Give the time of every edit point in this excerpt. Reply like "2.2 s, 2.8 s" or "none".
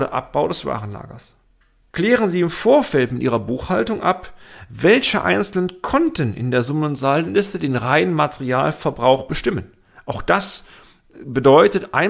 1.9 s